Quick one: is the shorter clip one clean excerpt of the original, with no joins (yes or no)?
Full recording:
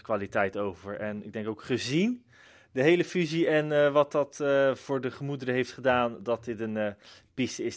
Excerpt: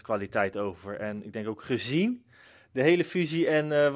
yes